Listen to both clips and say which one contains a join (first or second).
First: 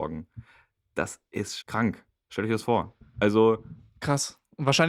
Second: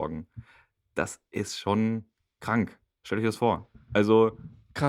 first